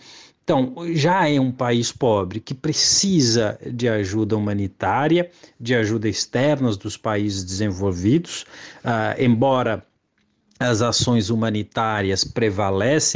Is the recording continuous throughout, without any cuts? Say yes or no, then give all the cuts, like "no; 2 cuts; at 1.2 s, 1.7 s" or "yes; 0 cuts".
yes; 0 cuts